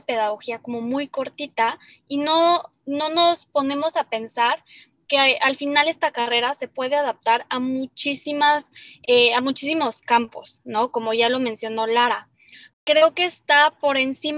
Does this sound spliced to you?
yes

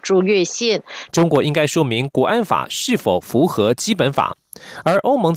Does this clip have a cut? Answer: yes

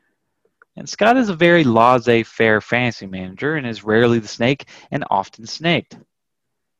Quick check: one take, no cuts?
yes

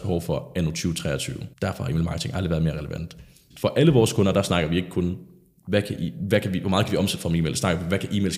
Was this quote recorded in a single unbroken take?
no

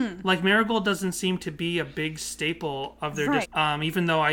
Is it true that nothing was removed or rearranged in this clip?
no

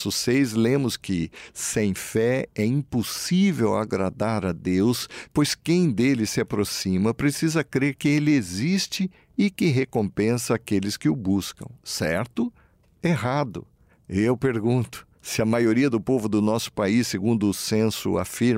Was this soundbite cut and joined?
no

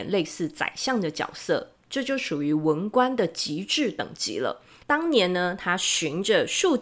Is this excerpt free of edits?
no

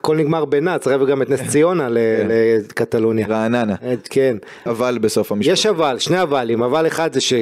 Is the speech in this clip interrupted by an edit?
yes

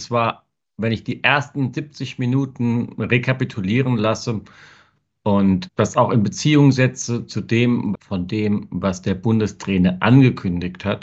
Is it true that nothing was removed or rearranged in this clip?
no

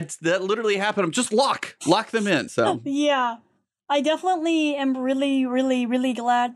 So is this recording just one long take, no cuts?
no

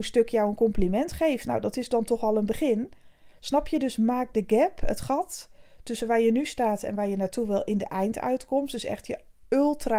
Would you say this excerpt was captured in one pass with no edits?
yes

